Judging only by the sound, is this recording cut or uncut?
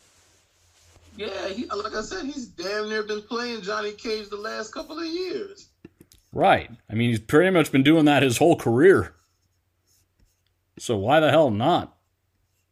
uncut